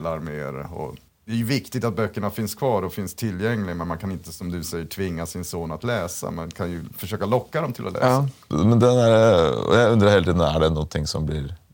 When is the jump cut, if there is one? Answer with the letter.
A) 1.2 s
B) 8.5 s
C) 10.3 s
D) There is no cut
B